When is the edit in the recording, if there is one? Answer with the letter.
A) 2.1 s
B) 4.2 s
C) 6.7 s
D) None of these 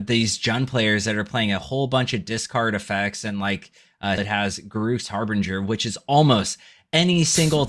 B